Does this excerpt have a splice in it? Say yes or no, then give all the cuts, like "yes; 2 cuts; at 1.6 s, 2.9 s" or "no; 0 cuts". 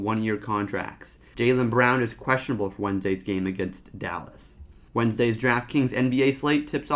yes; 1 cut; at 1.3 s